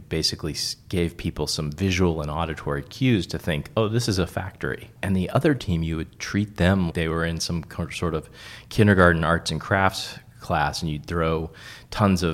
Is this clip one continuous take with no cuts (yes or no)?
no